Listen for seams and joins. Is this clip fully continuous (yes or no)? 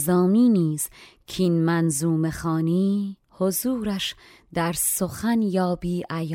no